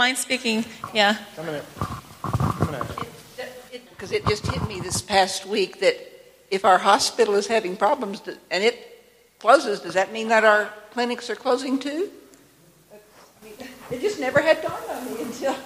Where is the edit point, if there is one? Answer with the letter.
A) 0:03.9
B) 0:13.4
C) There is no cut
A